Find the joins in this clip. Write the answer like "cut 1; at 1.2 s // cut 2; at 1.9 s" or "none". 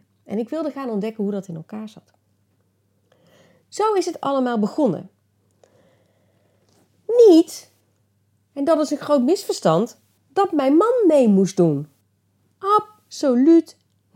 none